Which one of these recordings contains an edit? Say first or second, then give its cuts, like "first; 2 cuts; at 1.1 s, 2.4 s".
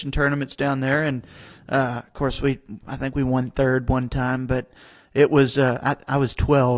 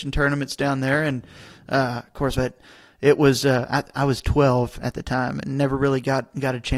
second; 1 cut; at 2.3 s